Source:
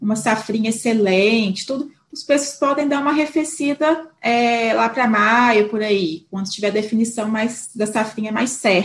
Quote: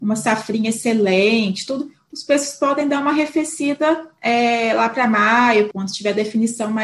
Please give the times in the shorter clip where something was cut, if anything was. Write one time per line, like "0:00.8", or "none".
0:05.7